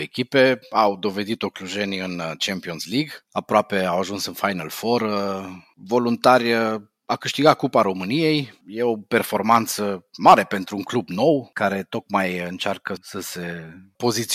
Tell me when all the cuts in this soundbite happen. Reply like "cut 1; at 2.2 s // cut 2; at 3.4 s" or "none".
cut 1; at 13.0 s